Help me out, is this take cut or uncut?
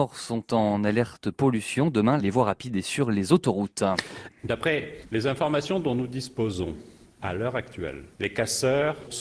cut